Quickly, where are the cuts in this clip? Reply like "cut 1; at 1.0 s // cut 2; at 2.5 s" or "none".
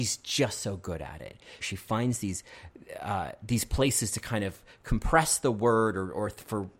cut 1; at 1.6 s